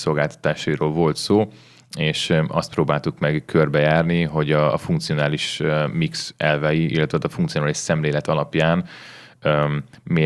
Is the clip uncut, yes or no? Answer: yes